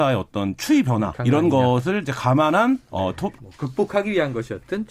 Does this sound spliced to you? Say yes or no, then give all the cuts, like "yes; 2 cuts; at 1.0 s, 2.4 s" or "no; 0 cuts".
yes; 2 cuts; at 1.1 s, 3.4 s